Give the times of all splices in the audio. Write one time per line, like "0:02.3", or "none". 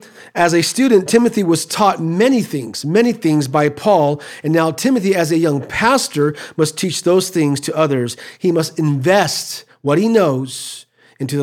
none